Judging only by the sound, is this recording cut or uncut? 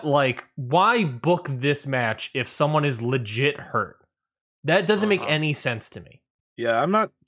cut